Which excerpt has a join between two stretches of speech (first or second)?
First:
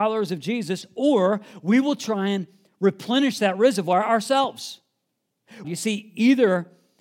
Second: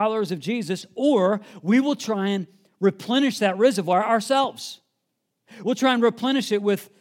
first